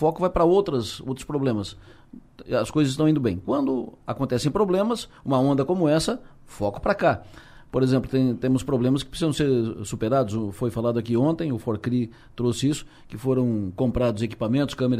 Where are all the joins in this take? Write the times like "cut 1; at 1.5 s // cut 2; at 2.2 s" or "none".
none